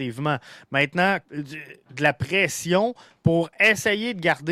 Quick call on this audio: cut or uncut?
cut